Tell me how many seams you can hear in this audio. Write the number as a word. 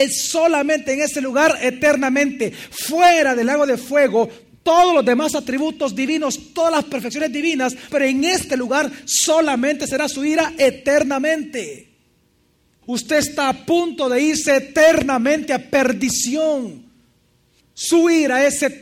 three